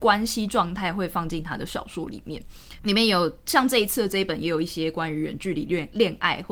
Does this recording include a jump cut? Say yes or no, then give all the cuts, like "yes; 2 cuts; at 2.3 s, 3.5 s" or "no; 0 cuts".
yes; 1 cut; at 2.8 s